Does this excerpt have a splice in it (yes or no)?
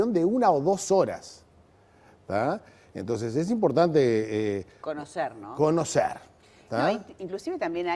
no